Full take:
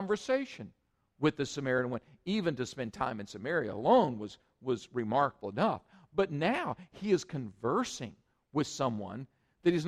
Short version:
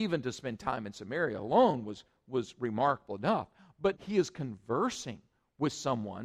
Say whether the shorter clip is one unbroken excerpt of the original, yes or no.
no